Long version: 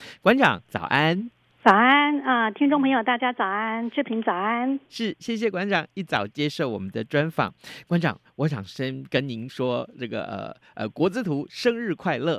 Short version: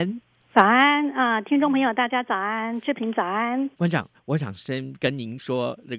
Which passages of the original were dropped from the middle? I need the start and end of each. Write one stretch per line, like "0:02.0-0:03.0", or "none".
0:04.8-0:07.8